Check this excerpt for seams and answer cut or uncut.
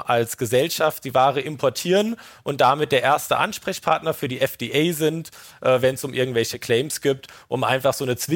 uncut